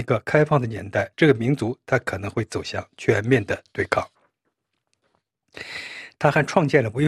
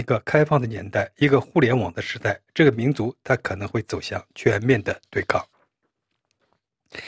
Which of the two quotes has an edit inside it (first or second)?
first